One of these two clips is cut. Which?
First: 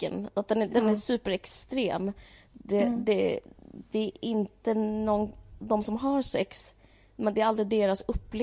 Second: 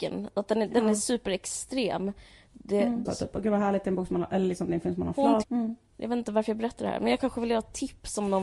second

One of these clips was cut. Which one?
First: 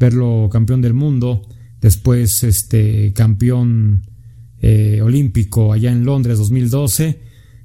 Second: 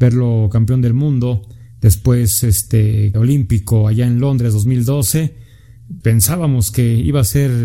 second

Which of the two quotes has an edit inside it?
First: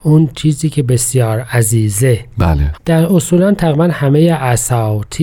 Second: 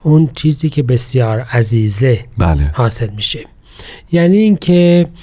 first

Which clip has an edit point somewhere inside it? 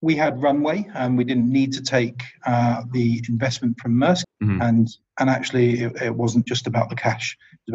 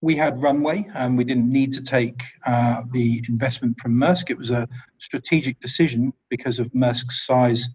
first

